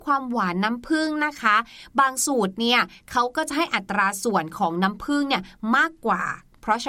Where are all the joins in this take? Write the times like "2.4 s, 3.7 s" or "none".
none